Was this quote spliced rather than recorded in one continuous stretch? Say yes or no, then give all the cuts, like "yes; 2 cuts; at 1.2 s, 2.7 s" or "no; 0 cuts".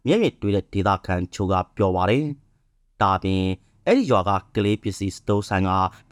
no; 0 cuts